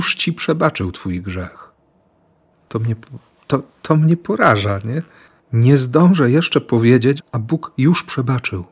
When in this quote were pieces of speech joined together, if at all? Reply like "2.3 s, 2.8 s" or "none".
7.2 s

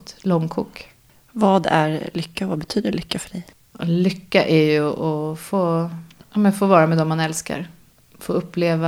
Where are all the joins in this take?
none

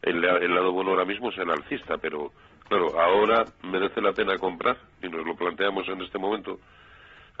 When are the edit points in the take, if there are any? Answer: 5.0 s

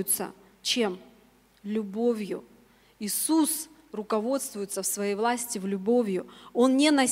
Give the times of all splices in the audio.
none

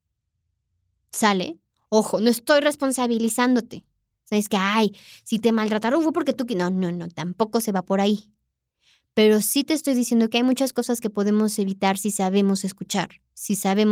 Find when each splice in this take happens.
none

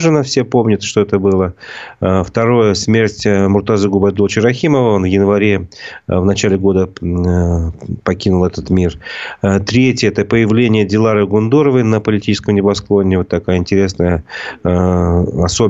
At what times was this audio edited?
none

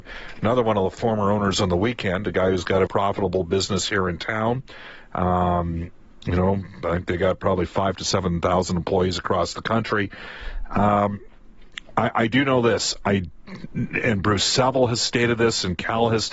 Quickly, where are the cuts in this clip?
2.9 s

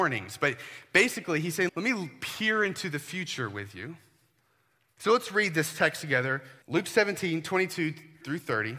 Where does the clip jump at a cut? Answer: 1.7 s, 5.0 s, 6.6 s

